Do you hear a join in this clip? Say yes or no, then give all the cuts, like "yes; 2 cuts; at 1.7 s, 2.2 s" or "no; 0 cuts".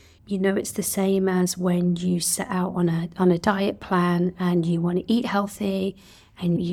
no; 0 cuts